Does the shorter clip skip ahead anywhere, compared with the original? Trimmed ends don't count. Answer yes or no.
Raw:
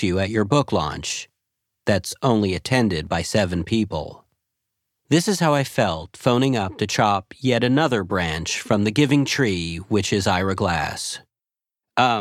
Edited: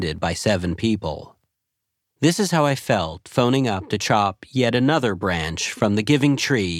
no